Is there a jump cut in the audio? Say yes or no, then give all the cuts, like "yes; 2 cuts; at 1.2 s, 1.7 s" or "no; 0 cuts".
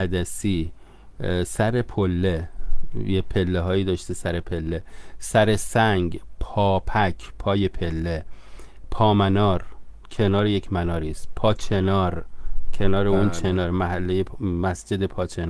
no; 0 cuts